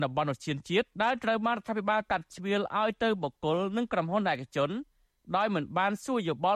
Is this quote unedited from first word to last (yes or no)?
no